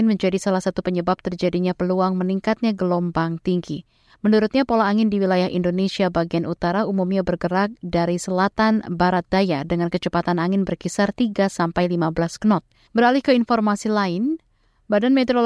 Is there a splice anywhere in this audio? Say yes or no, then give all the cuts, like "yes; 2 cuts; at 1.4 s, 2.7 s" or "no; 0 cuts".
yes; 1 cut; at 12.9 s